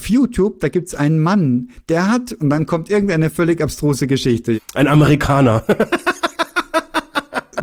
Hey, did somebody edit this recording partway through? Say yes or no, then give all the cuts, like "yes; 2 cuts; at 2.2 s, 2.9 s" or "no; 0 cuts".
no; 0 cuts